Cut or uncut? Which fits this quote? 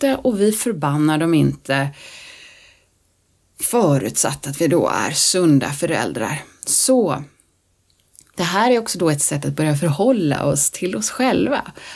uncut